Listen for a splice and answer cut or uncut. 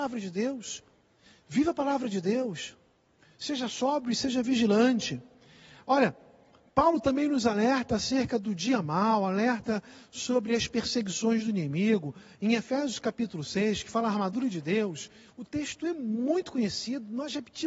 uncut